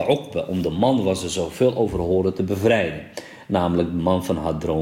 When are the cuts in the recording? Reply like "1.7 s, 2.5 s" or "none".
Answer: none